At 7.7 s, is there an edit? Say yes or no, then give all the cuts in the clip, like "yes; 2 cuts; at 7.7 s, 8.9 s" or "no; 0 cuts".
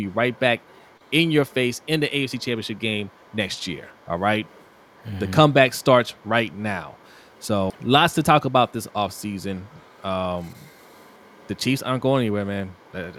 yes; 1 cut; at 7.7 s